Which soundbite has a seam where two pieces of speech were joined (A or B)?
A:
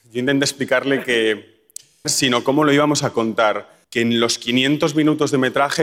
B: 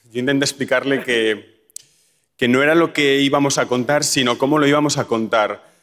A